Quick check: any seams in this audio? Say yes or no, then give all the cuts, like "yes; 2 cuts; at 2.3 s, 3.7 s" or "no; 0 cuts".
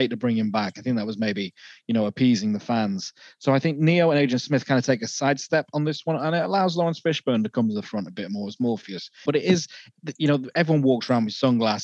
yes; 1 cut; at 9.3 s